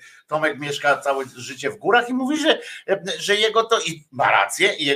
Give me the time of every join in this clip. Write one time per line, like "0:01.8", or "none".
none